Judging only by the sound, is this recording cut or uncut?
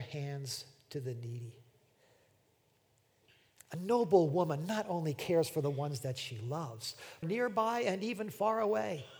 cut